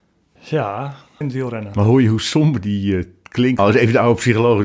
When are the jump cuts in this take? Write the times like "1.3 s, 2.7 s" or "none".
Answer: 1.2 s, 3.6 s